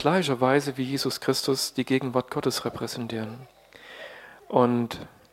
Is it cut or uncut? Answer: uncut